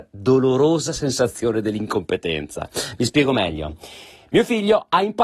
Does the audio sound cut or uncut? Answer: uncut